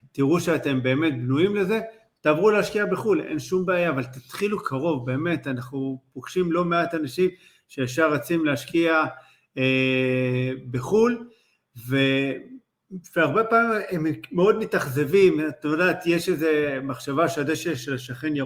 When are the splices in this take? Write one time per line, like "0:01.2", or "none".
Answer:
none